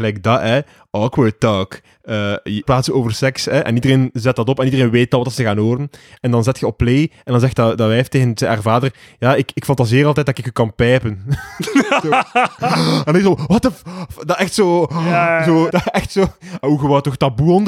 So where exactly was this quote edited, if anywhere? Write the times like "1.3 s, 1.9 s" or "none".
2.6 s, 15.7 s